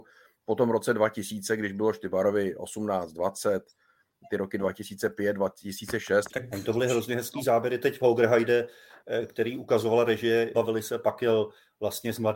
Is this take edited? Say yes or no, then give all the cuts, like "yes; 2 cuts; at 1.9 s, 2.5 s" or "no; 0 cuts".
yes; 2 cuts; at 6.3 s, 10.5 s